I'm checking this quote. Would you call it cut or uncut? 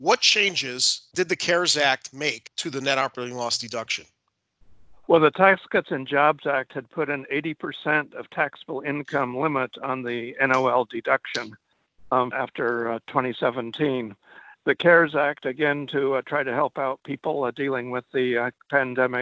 cut